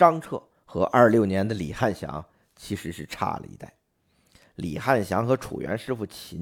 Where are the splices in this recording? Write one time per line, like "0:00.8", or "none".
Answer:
none